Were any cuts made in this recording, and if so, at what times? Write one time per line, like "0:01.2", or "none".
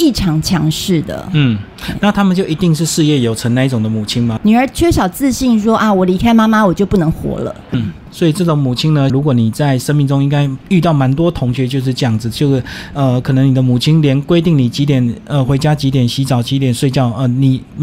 0:04.4
0:07.7
0:09.1